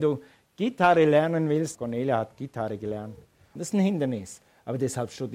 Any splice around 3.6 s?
yes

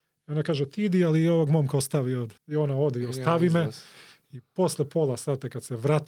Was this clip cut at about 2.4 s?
yes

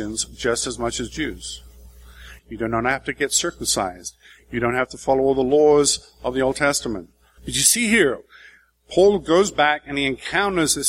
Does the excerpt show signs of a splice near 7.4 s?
yes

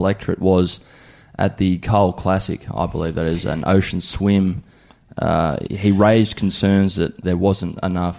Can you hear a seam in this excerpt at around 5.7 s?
yes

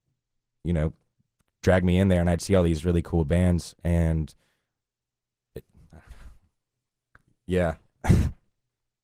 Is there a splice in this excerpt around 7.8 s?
no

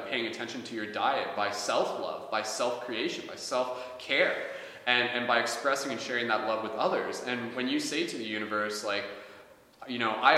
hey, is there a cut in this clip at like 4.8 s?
no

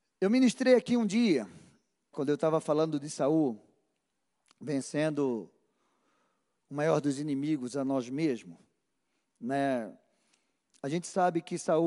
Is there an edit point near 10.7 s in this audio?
no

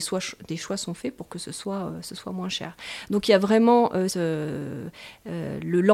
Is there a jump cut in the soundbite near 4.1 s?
yes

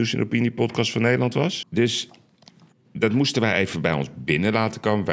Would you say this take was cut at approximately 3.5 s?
no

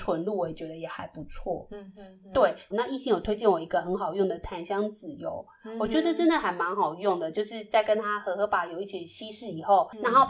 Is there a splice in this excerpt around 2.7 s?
yes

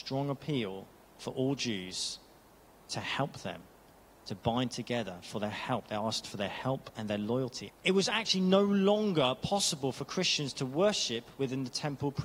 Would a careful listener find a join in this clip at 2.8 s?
no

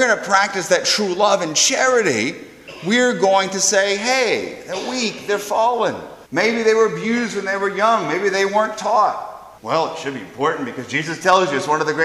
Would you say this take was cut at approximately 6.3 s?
yes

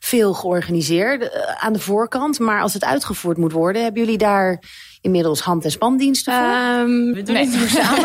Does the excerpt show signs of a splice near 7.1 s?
yes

